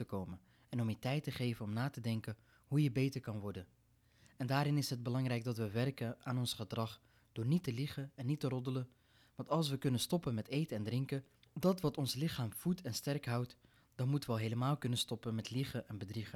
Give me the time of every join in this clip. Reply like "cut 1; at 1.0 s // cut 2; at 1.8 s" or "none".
none